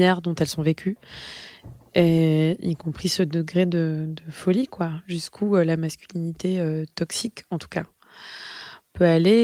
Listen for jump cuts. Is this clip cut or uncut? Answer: uncut